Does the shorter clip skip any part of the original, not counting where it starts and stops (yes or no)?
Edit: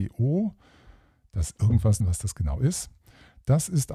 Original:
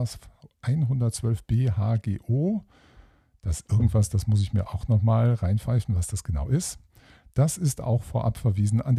yes